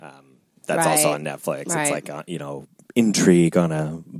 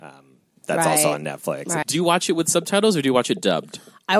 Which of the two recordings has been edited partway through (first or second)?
second